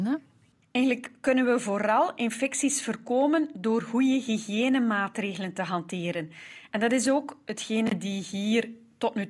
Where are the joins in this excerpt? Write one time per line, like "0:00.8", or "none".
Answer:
none